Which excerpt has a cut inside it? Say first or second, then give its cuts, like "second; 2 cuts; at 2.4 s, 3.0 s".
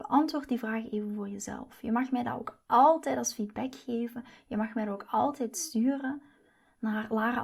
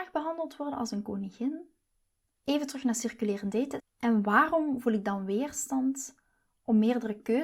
second; 2 cuts; at 2.4 s, 3.8 s